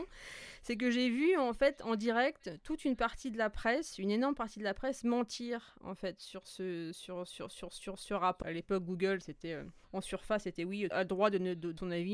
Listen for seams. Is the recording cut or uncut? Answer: cut